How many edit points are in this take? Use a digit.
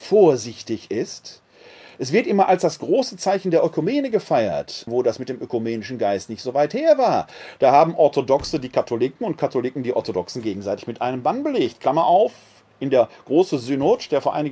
1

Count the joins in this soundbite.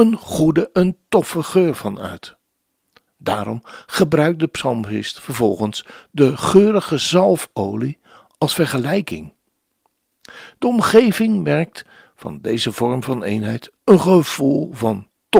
1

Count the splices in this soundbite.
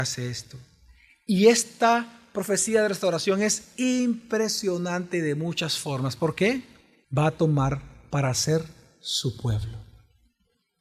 1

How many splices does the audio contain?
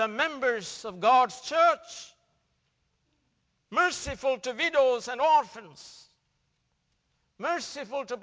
0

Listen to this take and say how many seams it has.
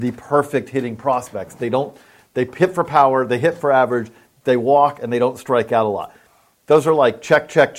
0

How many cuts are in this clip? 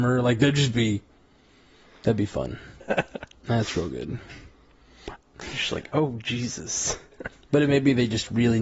3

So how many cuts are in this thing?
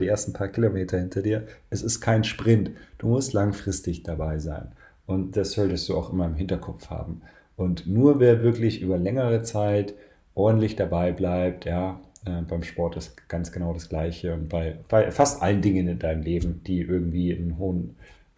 0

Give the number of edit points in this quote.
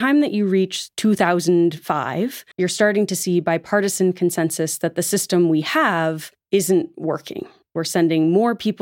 1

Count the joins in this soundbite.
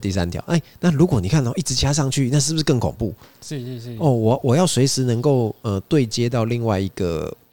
0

